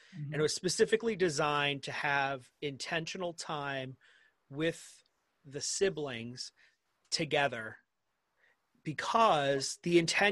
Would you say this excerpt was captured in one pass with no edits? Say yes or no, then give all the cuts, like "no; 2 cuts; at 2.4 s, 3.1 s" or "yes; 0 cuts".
yes; 0 cuts